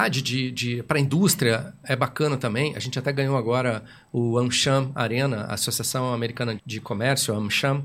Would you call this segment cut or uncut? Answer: cut